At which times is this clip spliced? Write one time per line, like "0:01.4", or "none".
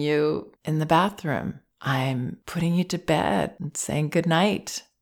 none